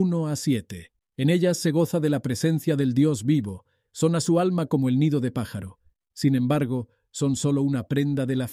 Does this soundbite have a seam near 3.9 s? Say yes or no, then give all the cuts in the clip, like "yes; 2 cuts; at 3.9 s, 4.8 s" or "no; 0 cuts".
yes; 2 cuts; at 1.1 s, 3.9 s